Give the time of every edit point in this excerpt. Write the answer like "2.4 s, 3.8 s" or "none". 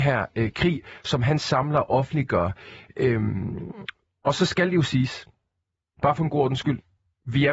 none